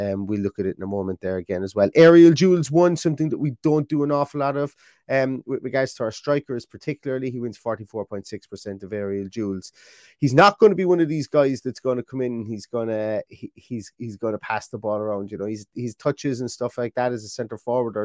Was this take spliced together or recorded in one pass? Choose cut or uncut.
uncut